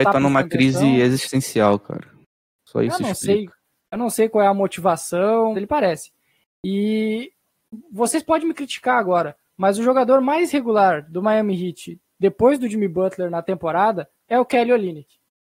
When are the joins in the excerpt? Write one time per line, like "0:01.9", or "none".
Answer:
0:05.5